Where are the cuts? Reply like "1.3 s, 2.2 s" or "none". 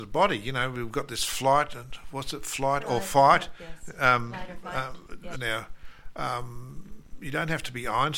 5.3 s